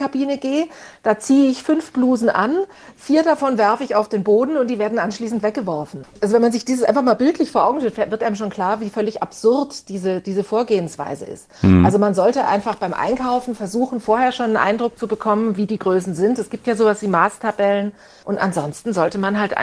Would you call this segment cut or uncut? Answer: uncut